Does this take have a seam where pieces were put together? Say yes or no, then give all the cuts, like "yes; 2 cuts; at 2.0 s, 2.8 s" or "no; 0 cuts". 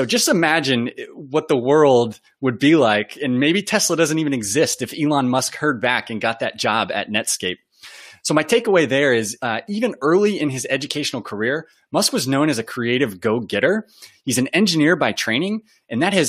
no; 0 cuts